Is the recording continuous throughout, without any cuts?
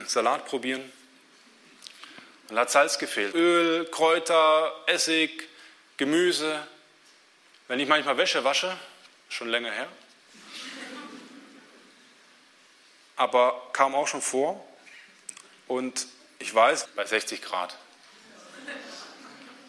no; 3 cuts; at 3.3 s, 7.5 s, 16.8 s

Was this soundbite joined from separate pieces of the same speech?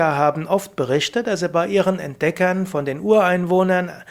no; 0 cuts

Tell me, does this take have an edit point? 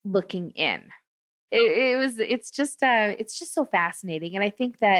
yes; 1 cut; at 1.5 s

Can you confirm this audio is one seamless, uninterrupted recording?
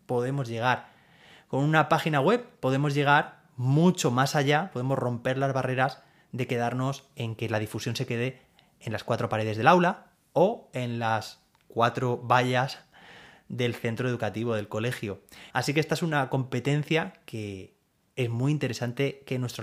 no; 1 cut; at 15.5 s

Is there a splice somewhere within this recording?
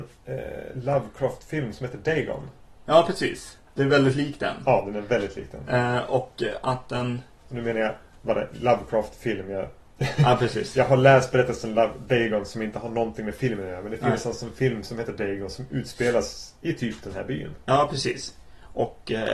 no; 0 cuts

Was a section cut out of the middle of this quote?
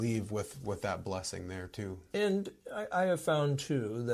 yes; 1 cut; at 2.1 s

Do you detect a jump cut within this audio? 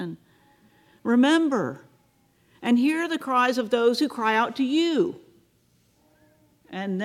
no; 0 cuts

